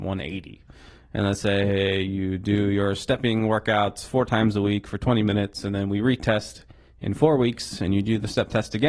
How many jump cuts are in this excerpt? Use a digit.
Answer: 0